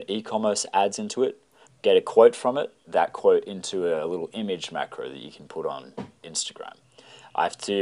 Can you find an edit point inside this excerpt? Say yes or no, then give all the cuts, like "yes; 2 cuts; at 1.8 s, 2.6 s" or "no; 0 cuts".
yes; 3 cuts; at 1.7 s, 2.8 s, 6.2 s